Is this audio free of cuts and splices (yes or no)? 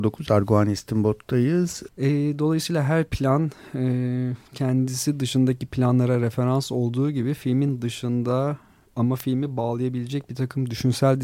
no